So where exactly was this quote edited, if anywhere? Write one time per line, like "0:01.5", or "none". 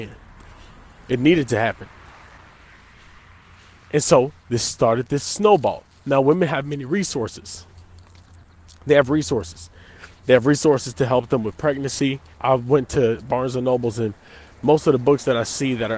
0:12.3